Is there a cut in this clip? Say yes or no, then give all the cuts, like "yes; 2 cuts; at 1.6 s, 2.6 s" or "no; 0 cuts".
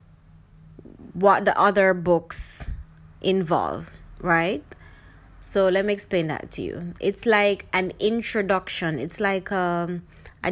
no; 0 cuts